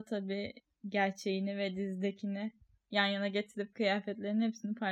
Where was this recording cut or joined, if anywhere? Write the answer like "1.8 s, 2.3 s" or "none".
none

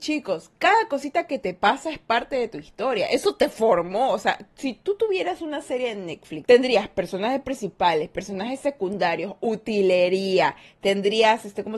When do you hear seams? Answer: 6.4 s

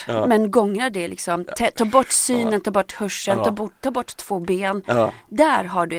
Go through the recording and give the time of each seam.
none

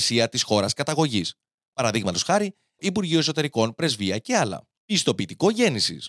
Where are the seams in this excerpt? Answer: 2.8 s, 4.8 s

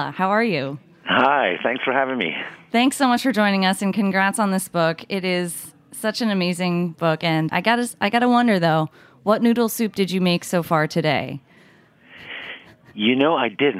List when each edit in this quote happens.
7.5 s

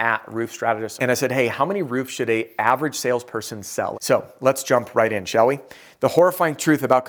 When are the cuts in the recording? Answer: 1.0 s, 3.9 s

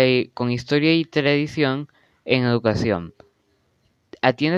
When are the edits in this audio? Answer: none

